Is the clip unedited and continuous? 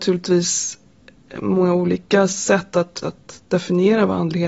no; 1 cut; at 3.0 s

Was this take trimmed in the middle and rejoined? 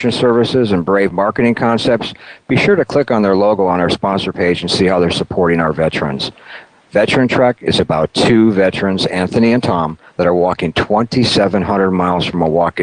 no; 0 cuts

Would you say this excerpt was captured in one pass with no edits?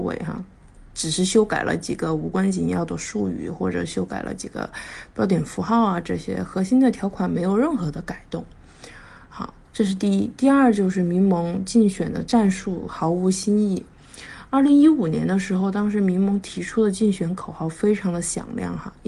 yes; 0 cuts

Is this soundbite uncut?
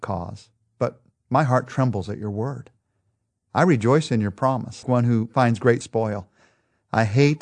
no; 1 cut; at 4.8 s

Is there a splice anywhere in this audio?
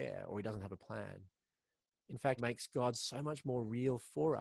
yes; 1 cut; at 2.4 s

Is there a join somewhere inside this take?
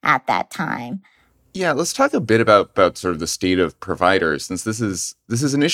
no; 0 cuts

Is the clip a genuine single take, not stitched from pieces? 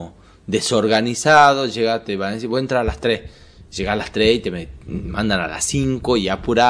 yes; 0 cuts

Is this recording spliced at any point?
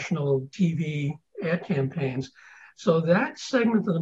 no; 0 cuts

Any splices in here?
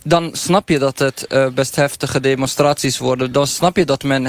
no; 0 cuts

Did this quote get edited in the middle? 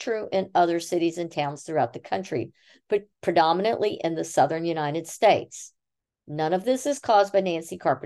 no; 0 cuts

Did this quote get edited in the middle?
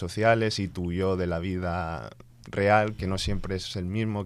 no; 0 cuts

